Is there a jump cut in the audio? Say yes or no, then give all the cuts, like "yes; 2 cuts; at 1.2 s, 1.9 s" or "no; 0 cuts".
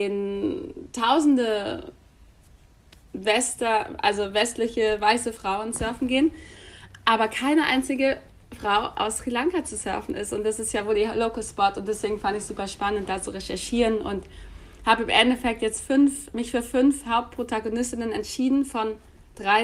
no; 0 cuts